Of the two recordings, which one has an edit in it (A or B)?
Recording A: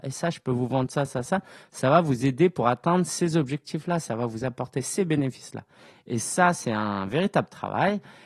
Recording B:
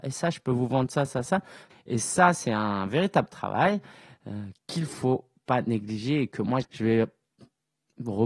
B